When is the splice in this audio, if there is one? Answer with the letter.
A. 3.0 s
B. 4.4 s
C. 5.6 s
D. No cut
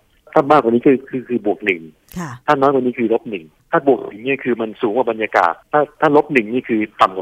C